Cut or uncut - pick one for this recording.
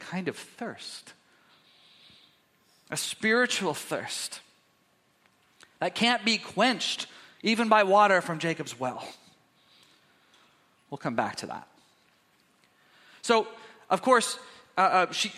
uncut